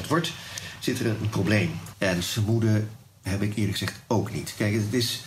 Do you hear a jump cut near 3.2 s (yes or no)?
no